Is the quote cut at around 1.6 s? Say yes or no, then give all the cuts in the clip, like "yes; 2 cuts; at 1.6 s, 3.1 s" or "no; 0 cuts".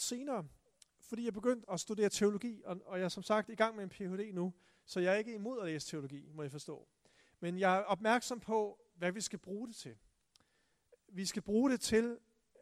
yes; 1 cut; at 1.6 s